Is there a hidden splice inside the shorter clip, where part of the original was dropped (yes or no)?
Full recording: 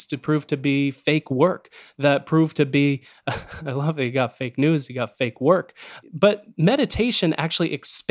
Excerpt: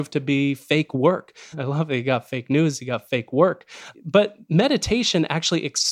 yes